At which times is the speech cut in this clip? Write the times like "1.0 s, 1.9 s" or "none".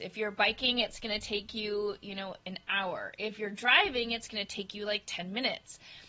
none